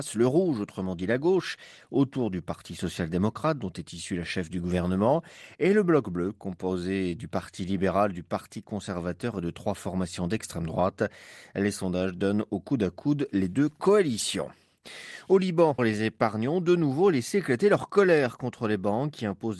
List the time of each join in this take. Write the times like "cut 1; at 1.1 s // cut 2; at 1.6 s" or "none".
cut 1; at 15.8 s